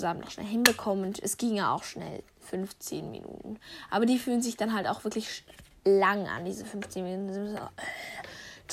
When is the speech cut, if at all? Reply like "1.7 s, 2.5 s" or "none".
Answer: none